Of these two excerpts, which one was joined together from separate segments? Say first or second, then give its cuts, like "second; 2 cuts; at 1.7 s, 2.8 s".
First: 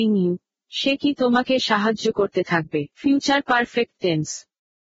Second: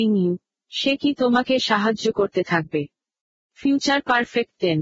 first; 1 cut; at 2.9 s